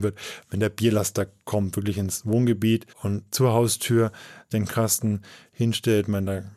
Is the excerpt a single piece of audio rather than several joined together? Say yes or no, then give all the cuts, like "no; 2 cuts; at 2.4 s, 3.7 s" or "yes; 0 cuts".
no; 2 cuts; at 2.9 s, 4.5 s